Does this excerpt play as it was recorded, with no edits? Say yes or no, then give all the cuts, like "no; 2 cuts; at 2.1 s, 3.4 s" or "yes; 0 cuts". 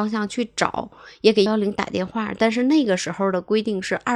no; 1 cut; at 1.5 s